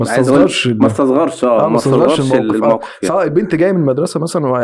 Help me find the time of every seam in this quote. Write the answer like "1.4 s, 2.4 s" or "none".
3.1 s